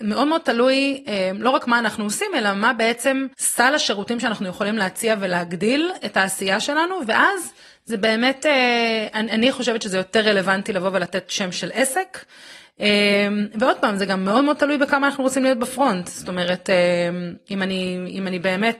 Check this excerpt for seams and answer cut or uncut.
cut